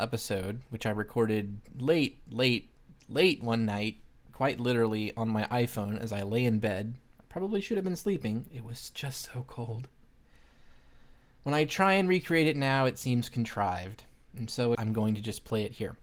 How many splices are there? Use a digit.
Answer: 2